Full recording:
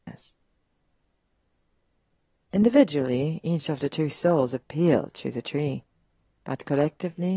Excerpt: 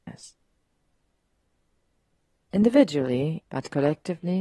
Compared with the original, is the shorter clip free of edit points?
no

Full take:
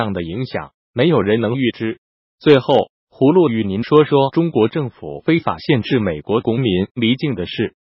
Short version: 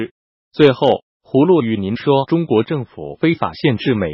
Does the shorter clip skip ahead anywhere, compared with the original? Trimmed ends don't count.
yes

